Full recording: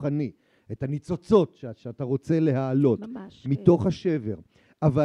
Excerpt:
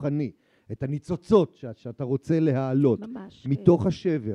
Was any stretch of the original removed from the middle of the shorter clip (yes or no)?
no